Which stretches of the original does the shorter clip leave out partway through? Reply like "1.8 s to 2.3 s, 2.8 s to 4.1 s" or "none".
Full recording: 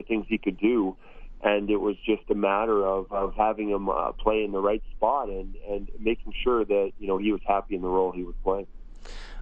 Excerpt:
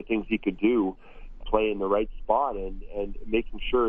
1.4 s to 4.1 s